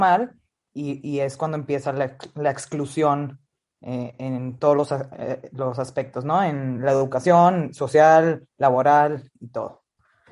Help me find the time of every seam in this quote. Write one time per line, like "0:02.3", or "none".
none